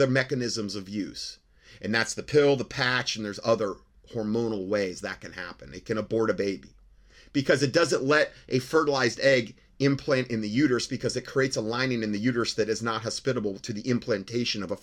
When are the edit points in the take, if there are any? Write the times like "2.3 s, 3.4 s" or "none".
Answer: none